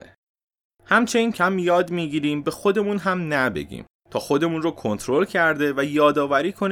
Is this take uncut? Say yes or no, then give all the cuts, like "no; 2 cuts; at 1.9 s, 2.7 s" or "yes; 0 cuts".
no; 1 cut; at 1.3 s